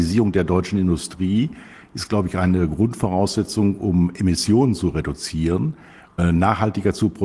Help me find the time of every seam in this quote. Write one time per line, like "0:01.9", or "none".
0:06.2